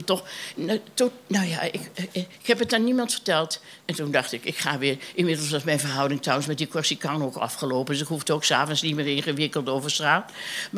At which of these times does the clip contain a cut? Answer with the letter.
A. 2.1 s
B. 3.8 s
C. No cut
B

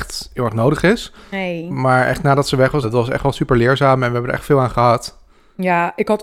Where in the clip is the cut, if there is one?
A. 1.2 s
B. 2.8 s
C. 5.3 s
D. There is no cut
B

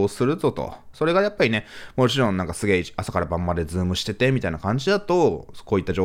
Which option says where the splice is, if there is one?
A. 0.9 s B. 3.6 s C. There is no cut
A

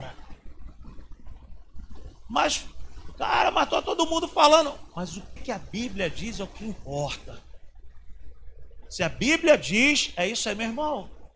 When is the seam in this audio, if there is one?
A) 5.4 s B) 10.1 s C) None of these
A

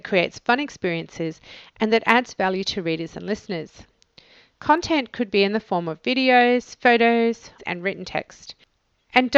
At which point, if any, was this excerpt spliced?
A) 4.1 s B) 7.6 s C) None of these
B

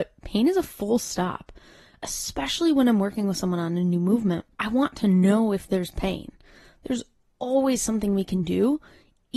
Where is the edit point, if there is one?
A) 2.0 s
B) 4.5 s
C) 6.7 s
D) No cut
B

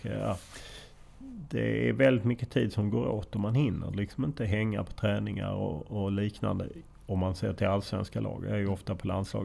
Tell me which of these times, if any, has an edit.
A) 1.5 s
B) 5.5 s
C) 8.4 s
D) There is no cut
D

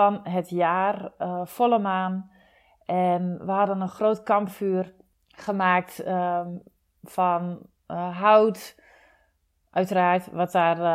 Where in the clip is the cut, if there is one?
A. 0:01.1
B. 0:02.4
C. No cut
C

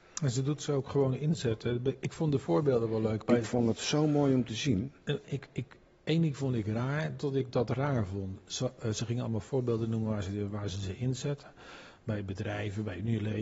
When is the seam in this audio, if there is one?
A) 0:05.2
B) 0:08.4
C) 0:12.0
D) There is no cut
A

